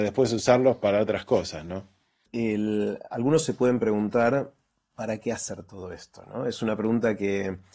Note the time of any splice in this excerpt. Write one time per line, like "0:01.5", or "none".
0:02.3

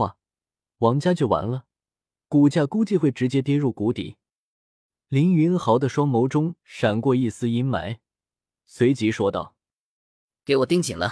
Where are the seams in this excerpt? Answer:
none

